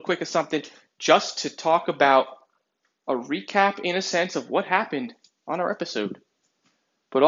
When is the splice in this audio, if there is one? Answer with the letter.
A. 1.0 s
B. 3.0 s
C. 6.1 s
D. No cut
D